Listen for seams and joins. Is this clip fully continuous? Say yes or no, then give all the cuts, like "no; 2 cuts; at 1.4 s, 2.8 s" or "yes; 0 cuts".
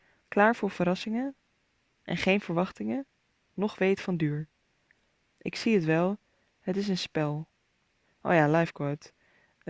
yes; 0 cuts